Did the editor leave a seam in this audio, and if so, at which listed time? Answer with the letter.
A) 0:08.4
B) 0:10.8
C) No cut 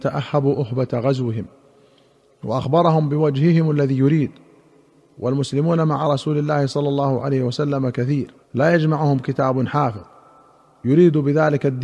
A